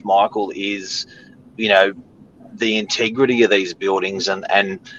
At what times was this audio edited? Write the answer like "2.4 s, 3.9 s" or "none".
none